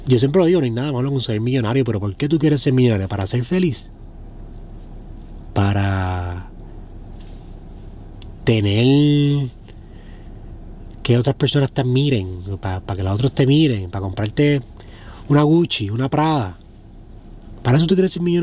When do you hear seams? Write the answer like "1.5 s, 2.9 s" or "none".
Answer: none